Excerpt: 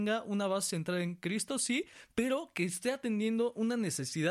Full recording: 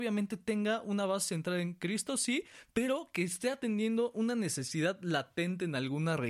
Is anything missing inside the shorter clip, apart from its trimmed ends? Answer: no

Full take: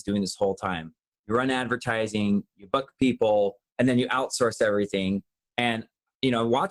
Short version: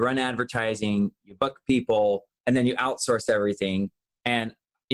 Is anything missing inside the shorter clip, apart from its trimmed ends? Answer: no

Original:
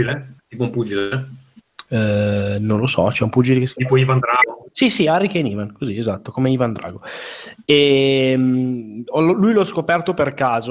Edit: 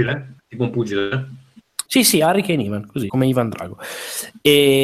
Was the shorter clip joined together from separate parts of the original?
yes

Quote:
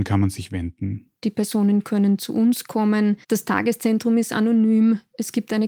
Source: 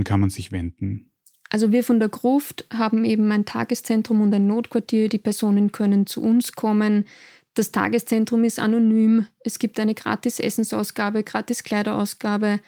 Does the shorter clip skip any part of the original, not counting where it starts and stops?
yes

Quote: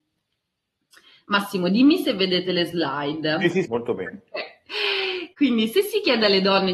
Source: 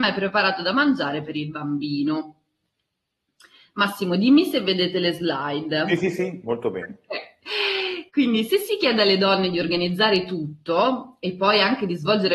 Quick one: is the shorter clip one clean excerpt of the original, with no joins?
no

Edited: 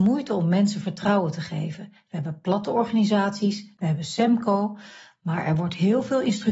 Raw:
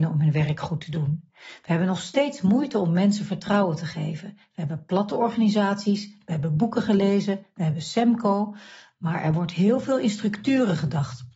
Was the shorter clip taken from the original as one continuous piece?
no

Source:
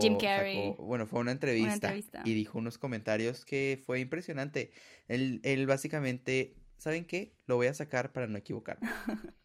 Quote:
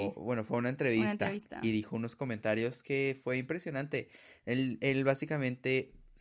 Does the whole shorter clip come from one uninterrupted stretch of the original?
yes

